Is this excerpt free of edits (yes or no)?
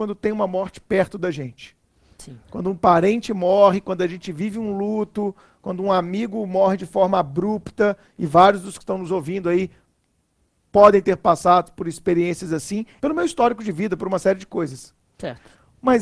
no